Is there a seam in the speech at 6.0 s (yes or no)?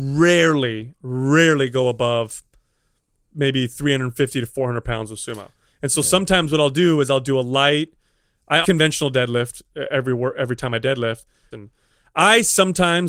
no